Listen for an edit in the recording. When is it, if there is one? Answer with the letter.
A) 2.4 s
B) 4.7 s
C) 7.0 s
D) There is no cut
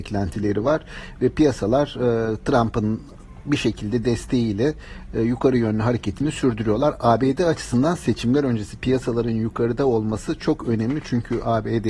D